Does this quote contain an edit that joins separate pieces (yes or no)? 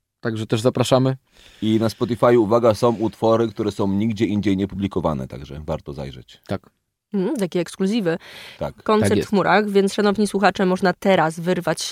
yes